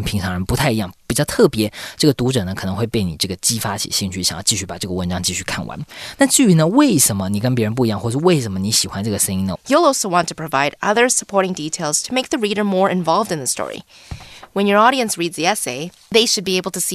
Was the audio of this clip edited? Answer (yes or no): yes